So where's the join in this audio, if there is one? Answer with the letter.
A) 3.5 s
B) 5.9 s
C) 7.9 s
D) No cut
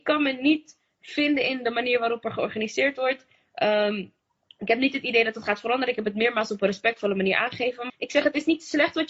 C